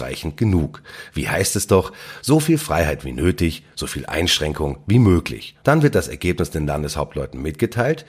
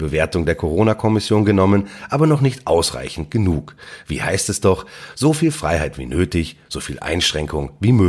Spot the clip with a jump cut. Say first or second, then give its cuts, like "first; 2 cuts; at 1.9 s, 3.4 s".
first; 1 cut; at 5.6 s